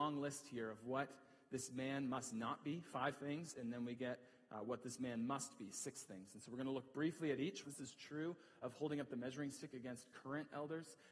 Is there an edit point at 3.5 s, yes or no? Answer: no